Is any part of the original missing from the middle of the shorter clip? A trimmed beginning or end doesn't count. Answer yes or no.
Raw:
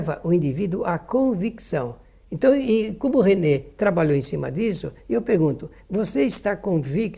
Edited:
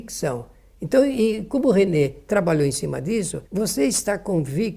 yes